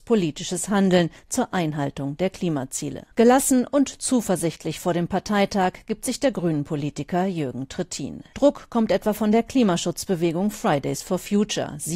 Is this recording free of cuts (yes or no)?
no